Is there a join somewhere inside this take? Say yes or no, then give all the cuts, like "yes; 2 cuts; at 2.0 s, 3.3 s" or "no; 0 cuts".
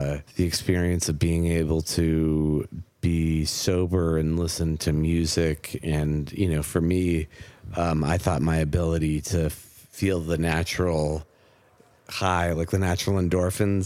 no; 0 cuts